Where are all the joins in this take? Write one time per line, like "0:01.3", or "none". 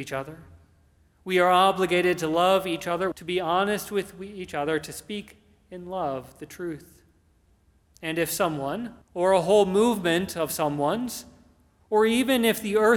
0:03.1
0:07.8
0:09.0